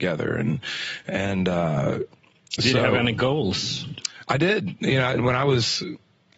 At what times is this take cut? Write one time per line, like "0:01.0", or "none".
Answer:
0:05.2